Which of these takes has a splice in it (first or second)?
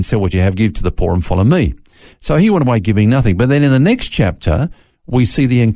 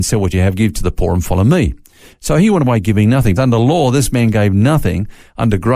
second